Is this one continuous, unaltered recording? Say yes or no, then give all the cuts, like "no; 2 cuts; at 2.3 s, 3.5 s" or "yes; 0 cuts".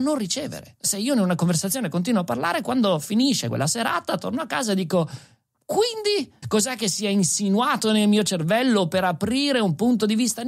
no; 1 cut; at 6.4 s